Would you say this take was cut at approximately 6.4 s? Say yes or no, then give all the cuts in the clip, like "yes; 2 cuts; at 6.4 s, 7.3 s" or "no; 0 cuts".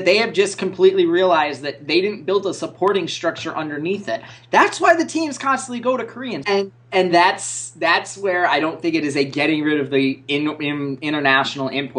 yes; 1 cut; at 6.4 s